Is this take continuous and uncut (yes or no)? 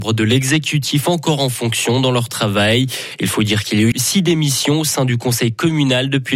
no